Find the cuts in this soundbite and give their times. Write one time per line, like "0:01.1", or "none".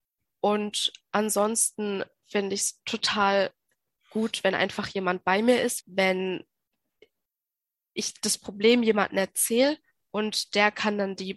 0:05.8